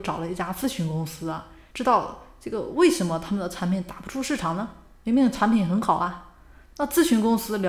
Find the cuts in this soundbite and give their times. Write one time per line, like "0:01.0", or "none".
0:01.7